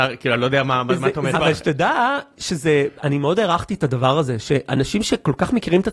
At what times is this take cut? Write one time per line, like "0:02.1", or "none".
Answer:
0:01.3